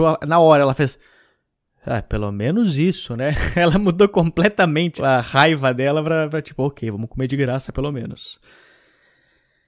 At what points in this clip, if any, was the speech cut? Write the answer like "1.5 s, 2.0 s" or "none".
5.0 s